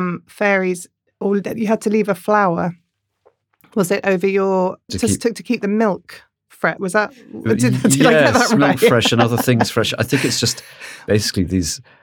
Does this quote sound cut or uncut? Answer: cut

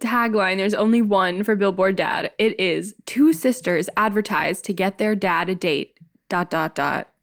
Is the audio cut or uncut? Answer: uncut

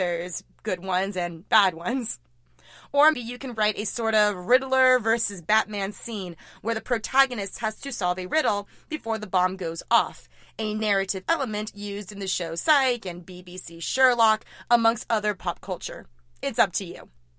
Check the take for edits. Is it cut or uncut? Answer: cut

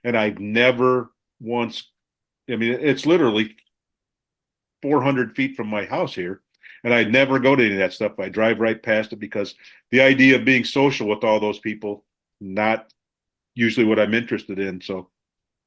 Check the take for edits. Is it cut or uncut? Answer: uncut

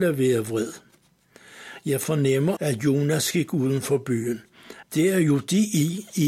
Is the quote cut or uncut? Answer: cut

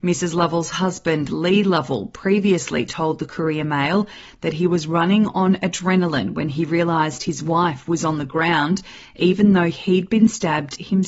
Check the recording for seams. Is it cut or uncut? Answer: uncut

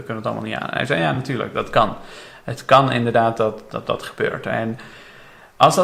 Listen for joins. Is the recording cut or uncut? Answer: uncut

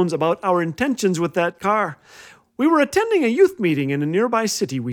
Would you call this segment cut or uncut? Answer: uncut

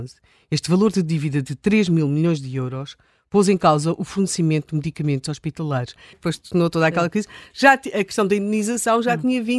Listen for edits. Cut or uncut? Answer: cut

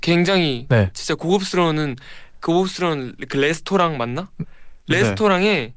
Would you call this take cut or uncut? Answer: uncut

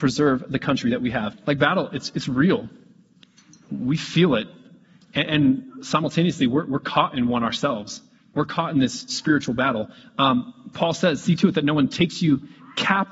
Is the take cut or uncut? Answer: cut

